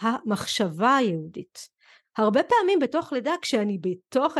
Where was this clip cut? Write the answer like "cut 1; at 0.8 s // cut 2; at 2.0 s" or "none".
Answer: cut 1; at 2.0 s